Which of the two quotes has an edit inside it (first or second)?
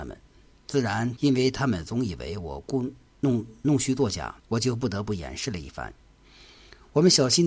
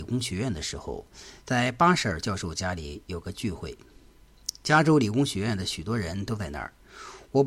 first